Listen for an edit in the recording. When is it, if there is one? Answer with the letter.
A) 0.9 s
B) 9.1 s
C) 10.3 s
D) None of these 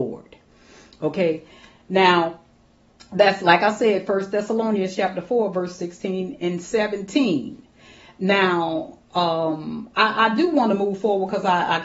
D